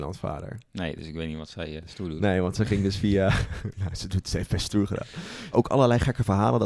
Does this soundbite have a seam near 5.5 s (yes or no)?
yes